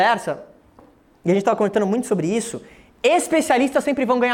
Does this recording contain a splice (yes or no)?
no